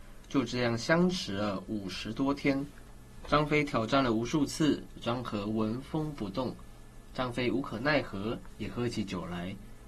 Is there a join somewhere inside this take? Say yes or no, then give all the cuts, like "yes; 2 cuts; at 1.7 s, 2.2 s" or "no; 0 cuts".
no; 0 cuts